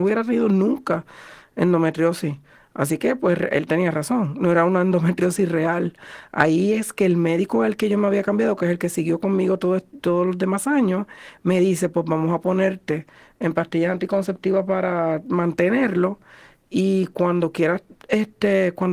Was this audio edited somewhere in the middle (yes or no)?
no